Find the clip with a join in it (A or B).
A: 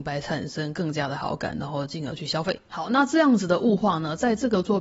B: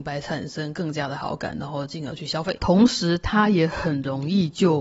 B